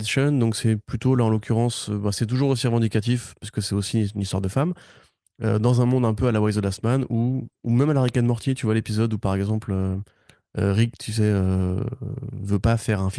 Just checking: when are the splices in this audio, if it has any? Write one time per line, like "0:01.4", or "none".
none